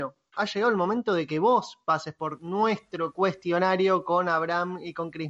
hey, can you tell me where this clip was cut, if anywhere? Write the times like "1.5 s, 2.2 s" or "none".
none